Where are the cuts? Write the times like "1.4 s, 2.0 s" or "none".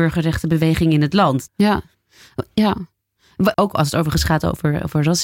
1.5 s, 3.5 s